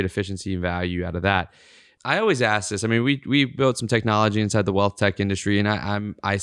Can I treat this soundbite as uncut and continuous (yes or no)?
yes